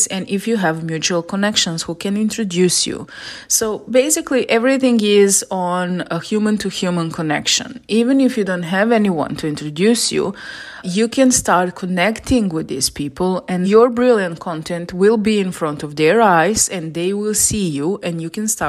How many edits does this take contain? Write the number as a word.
two